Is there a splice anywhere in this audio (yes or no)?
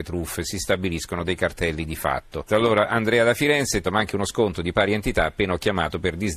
yes